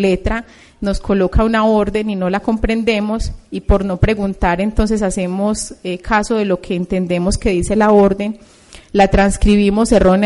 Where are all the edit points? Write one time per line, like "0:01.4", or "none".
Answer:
none

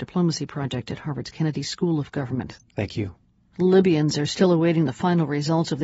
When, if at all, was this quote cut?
0:02.6

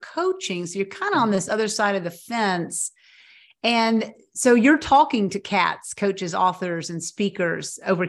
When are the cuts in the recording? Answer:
none

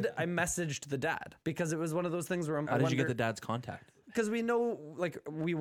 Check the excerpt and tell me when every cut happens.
0:01.4
0:02.7

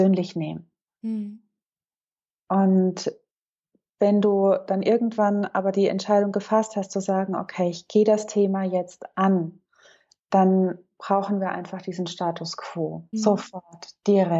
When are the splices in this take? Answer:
0:13.1

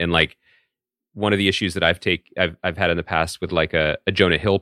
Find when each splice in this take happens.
none

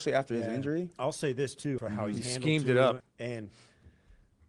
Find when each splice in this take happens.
0:01.8
0:03.0

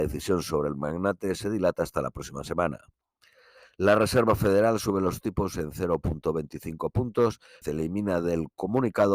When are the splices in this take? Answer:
0:07.6

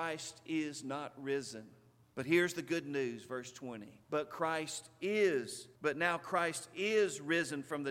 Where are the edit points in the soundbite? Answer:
0:02.0
0:04.0
0:05.8

